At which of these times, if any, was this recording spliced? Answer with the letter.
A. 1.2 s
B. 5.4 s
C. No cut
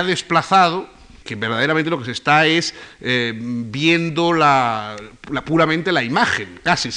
A